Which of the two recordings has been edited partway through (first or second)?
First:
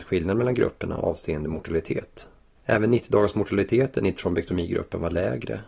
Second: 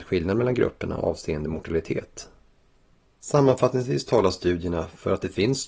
first